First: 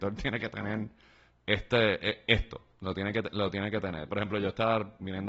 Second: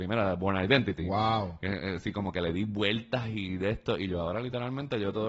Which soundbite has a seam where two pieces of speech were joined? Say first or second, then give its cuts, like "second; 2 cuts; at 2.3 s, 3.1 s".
first; 1 cut; at 4.1 s